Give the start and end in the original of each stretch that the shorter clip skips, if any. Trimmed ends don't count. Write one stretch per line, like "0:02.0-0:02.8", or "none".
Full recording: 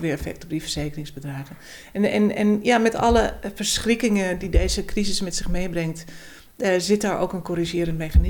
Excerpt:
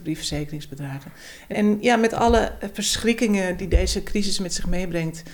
0:02.0-0:02.3